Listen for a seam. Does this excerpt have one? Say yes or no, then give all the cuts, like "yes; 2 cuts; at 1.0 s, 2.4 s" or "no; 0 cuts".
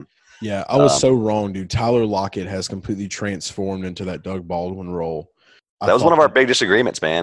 no; 0 cuts